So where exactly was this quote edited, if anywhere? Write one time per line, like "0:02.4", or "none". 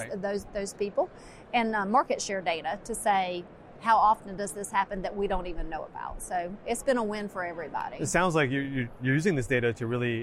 none